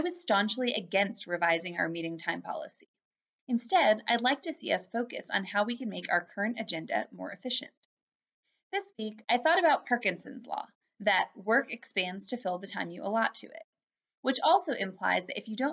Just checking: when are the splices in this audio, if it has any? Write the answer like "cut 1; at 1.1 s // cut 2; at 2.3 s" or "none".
none